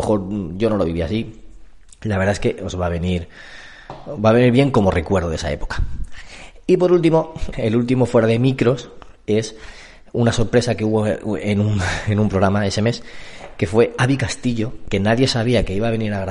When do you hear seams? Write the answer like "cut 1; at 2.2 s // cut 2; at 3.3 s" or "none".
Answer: cut 1; at 7.5 s

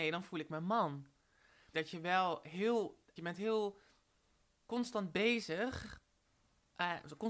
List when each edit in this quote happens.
cut 1; at 1.7 s // cut 2; at 3.2 s

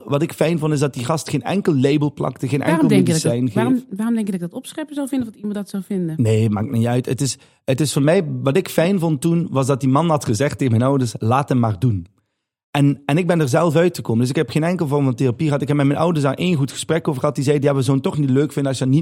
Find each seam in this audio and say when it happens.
none

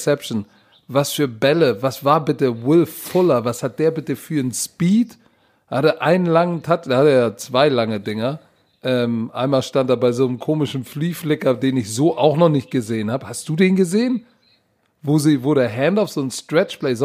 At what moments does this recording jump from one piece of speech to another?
none

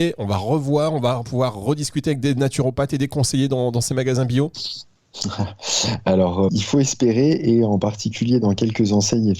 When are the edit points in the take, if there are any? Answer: cut 1; at 6.5 s

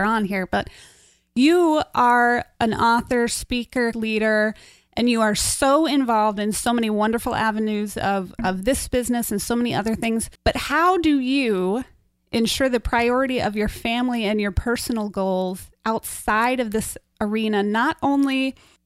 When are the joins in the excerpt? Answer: cut 1; at 3.9 s // cut 2; at 10.4 s

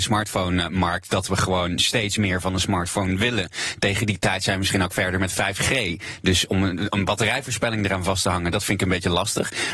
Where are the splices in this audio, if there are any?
none

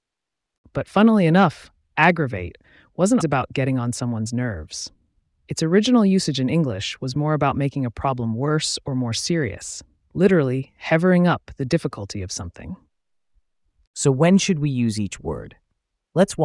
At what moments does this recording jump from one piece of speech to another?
cut 1; at 3.2 s

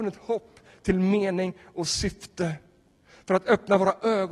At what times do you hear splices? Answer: none

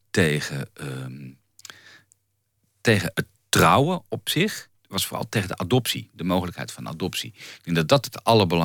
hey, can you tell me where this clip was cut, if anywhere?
cut 1; at 3.1 s // cut 2; at 4.8 s

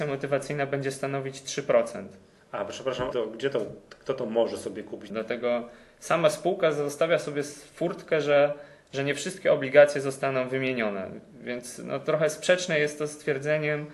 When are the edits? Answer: cut 1; at 3.1 s // cut 2; at 5.1 s

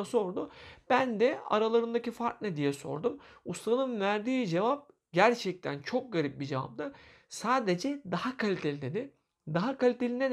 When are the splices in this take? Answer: none

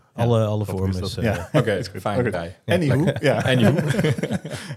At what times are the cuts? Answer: cut 1; at 2.3 s

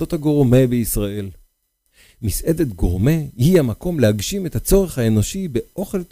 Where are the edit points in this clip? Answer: none

